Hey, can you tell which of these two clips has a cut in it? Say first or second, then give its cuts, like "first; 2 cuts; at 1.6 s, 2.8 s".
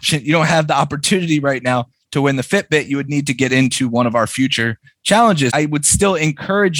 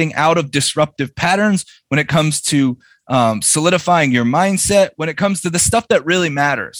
first; 1 cut; at 5.5 s